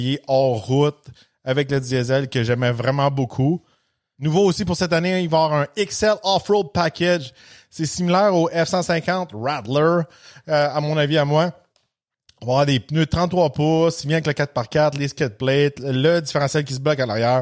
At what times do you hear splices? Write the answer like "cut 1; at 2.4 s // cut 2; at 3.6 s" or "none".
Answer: none